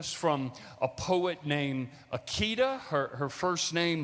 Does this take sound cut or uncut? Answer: uncut